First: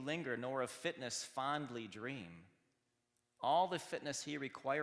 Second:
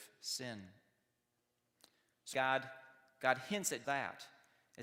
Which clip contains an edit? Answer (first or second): second